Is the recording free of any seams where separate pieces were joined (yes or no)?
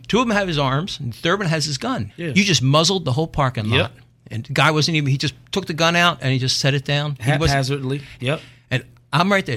no